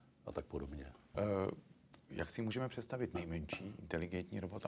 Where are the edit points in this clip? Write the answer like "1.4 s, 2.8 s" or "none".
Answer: 1.1 s